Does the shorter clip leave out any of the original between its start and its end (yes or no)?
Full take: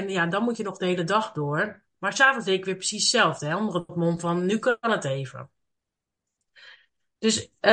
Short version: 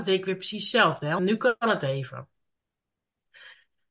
yes